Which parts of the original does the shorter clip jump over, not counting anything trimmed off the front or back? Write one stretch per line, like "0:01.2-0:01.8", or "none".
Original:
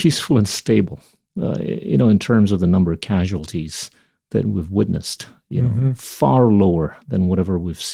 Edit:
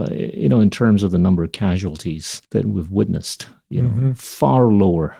0:03.9-0:04.2